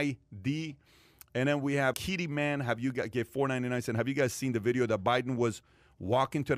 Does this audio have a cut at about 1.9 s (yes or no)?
yes